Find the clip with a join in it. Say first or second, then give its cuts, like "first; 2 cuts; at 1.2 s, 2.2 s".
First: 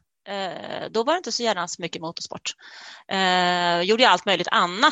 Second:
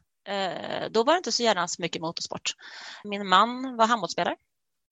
second; 1 cut; at 3.0 s